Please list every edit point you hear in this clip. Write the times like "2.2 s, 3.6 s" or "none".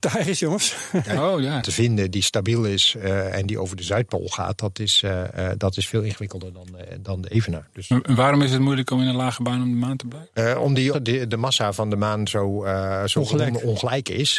1.6 s, 10.9 s